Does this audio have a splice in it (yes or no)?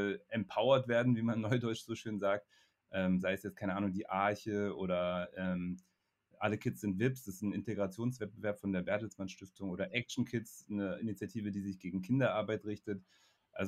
no